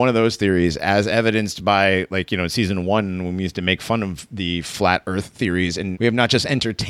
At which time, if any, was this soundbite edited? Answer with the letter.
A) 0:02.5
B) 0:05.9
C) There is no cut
B